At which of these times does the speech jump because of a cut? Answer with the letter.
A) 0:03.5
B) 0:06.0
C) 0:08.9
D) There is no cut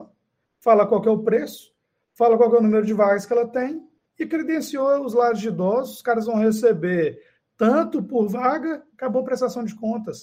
C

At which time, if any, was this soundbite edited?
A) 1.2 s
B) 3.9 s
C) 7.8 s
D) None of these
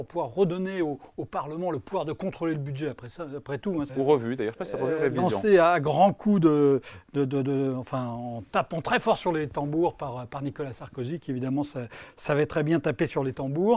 B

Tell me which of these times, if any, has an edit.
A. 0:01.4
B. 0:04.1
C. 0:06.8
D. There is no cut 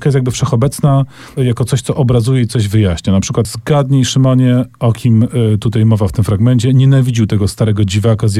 A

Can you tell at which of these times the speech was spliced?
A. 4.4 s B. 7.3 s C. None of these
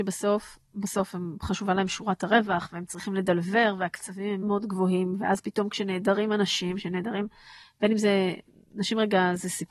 A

